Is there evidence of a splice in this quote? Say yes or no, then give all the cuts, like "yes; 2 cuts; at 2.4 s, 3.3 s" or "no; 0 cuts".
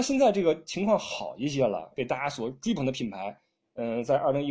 yes; 1 cut; at 1.9 s